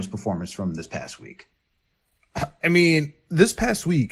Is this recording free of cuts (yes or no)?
yes